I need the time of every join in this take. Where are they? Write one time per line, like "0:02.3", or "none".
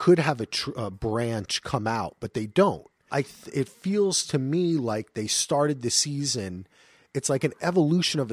0:03.1